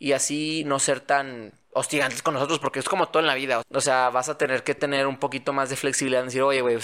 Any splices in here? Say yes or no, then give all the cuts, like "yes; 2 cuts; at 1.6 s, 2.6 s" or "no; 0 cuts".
yes; 1 cut; at 3.6 s